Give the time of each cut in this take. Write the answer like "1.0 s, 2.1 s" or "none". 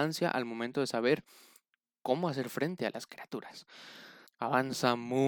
4.3 s